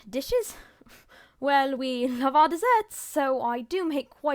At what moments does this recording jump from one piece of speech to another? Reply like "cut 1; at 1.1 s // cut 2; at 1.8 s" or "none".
none